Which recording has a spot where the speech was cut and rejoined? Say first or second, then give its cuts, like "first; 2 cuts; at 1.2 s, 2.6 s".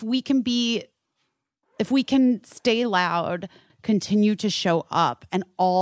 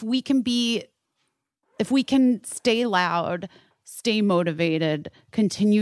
first; 1 cut; at 3.7 s